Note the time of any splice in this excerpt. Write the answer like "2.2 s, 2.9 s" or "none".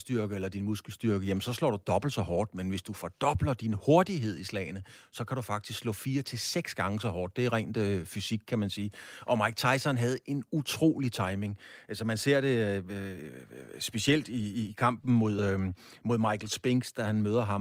none